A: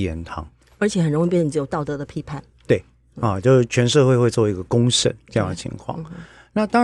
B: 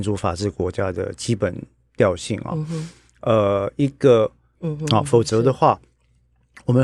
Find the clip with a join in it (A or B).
B